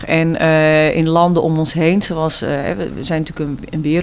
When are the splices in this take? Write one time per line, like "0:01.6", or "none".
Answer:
none